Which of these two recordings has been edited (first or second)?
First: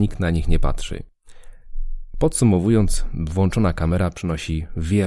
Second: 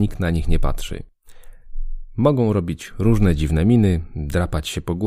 first